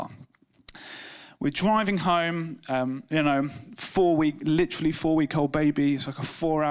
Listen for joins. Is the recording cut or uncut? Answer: uncut